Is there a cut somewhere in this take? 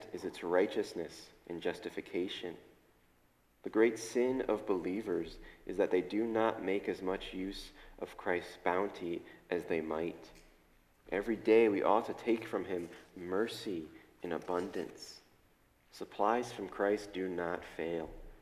no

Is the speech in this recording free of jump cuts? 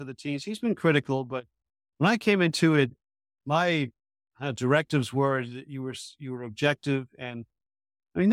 yes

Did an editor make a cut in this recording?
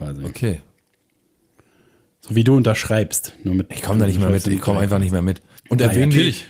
yes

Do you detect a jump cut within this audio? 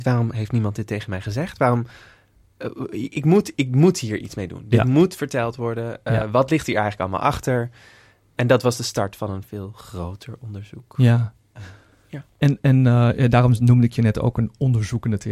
no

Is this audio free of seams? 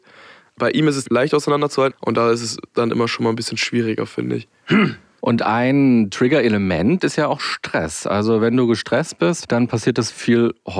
no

